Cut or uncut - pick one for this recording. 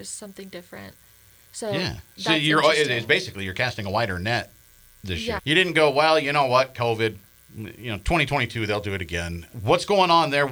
cut